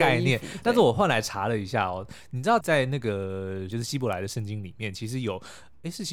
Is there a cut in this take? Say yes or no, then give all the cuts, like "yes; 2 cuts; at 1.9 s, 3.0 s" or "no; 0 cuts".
yes; 2 cuts; at 2.6 s, 3.7 s